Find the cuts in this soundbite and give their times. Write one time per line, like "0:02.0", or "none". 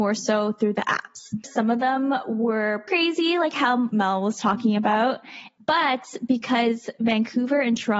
0:01.4
0:02.9
0:05.6